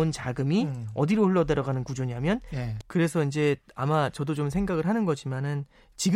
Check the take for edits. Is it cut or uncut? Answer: cut